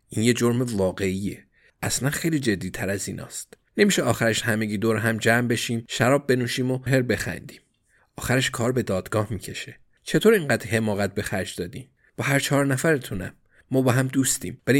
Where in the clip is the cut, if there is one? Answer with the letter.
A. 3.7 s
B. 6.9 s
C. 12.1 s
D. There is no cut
B